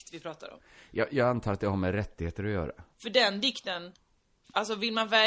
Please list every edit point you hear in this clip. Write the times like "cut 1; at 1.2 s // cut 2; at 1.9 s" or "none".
cut 1; at 2.9 s